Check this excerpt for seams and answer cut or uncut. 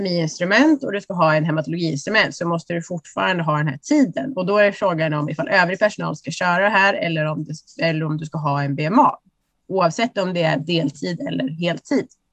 uncut